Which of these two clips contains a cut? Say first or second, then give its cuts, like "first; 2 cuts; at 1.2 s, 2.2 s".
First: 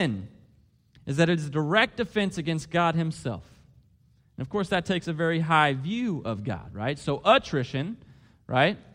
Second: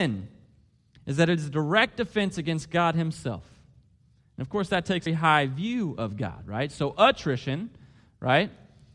second; 1 cut; at 5.1 s